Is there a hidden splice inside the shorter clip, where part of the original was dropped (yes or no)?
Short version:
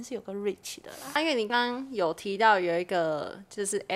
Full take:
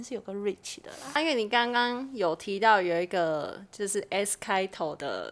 yes